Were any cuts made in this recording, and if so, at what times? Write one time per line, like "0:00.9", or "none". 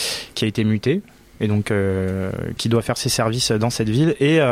0:02.6